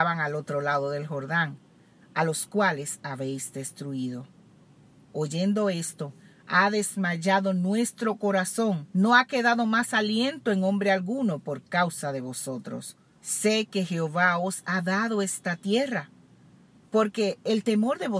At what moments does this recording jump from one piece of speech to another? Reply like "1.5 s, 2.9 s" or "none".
2.0 s, 8.9 s, 13.1 s